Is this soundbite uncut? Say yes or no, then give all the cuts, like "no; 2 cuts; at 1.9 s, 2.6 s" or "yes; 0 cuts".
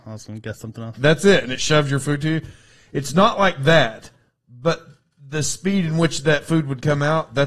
no; 1 cut; at 0.9 s